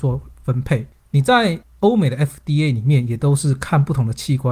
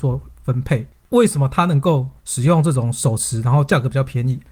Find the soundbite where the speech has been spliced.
second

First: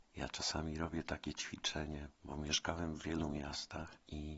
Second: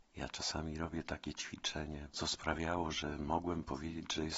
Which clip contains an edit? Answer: second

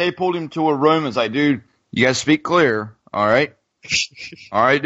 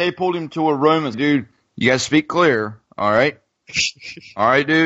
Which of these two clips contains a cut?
second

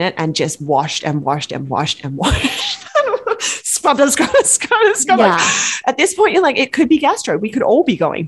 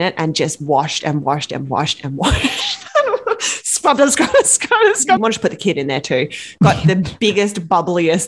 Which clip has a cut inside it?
second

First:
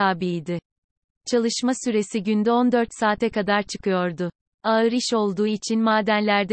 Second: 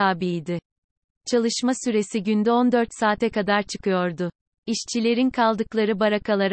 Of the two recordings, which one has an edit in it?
second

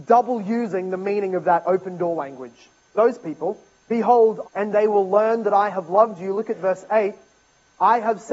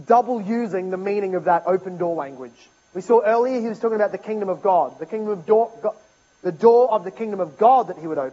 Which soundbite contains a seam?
first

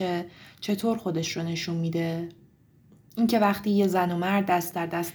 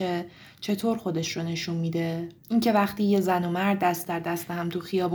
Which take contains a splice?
second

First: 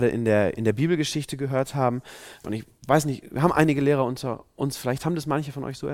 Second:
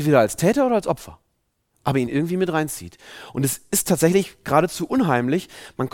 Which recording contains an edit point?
first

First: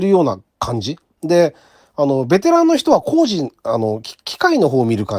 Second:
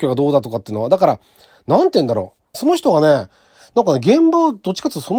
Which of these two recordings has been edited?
second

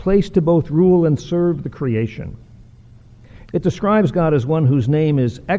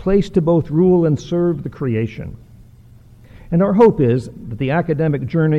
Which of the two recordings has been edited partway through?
first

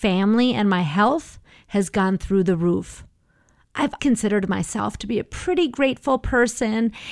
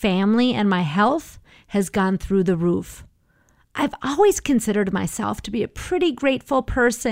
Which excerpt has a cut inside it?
first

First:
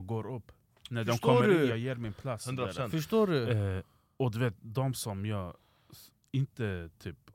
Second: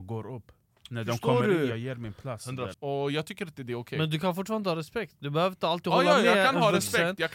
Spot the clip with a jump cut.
second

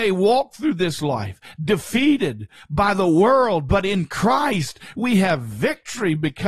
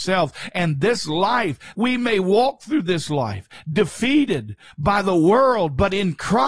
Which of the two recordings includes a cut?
second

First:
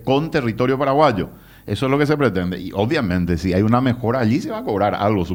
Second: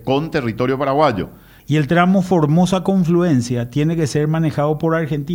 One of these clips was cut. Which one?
second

